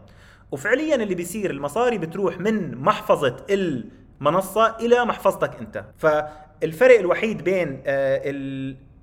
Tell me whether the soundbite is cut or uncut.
cut